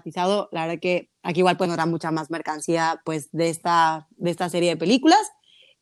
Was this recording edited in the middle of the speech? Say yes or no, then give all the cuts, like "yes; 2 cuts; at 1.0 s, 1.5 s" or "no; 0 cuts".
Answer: no; 0 cuts